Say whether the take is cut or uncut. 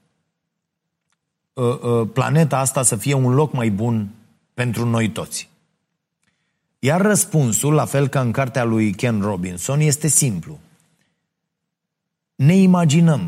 uncut